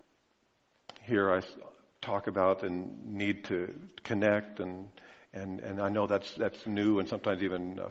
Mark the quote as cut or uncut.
uncut